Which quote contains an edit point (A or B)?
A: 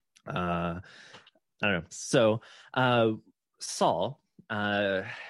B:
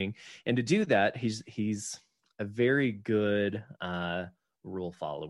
A